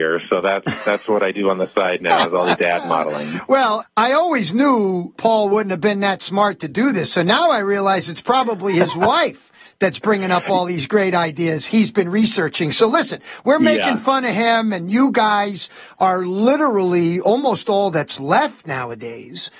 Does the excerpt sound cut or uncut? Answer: cut